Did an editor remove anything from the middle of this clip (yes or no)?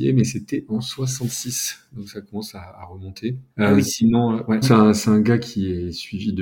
yes